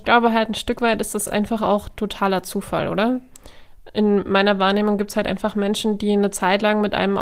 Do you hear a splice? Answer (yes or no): no